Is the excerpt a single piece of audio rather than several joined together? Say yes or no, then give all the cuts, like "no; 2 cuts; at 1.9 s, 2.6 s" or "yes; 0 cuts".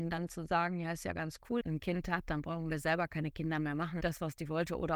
no; 2 cuts; at 1.6 s, 4.0 s